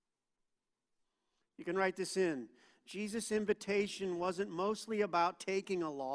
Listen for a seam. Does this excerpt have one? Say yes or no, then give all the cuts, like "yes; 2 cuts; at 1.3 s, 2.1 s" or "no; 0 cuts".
no; 0 cuts